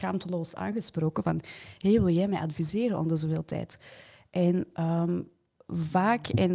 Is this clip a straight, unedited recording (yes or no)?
yes